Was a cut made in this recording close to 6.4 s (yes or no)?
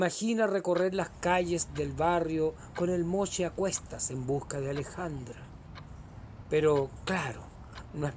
no